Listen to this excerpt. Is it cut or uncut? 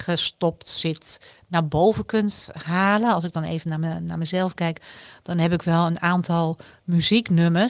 uncut